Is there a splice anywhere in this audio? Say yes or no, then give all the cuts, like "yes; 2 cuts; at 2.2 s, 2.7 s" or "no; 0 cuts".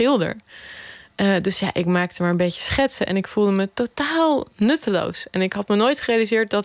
no; 0 cuts